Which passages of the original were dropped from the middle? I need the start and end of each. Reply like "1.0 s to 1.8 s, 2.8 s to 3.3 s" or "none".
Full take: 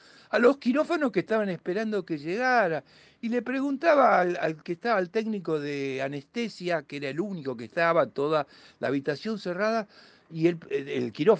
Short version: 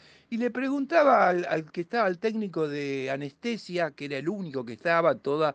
none